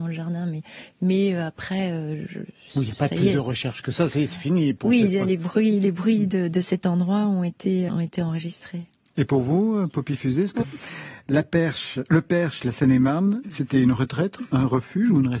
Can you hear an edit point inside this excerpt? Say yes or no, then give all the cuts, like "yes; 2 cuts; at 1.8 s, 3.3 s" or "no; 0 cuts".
yes; 2 cuts; at 7.9 s, 10.6 s